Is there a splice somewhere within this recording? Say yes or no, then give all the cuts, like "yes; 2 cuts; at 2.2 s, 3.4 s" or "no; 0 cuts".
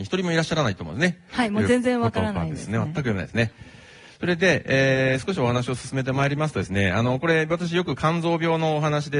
yes; 1 cut; at 1.3 s